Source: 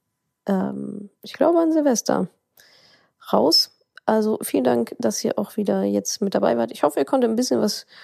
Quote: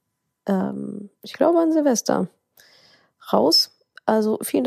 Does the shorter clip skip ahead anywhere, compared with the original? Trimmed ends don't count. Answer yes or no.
no